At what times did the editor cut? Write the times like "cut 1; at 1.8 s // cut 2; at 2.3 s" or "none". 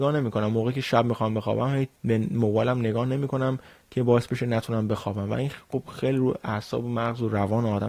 cut 1; at 2.0 s